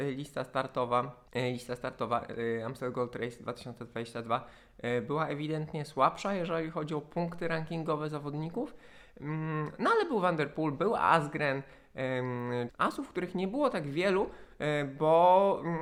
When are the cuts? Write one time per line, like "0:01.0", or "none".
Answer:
0:01.3
0:12.7